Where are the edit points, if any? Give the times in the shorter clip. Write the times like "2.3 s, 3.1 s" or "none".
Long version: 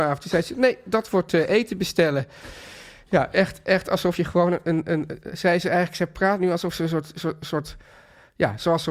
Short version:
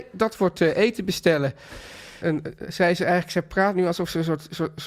2.2 s